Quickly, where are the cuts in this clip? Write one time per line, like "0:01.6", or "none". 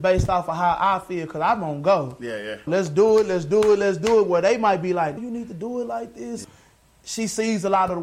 0:02.7
0:05.2
0:06.4